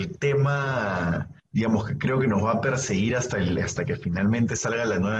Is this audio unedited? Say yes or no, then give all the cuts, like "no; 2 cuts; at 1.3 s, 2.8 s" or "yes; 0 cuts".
no; 1 cut; at 1.4 s